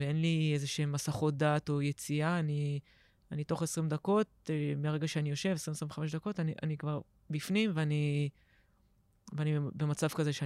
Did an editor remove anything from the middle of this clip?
no; 0 cuts

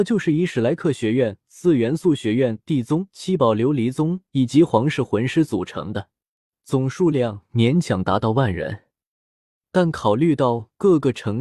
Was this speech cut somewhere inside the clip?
no; 0 cuts

